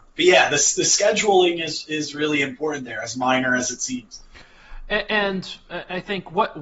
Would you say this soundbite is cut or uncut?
uncut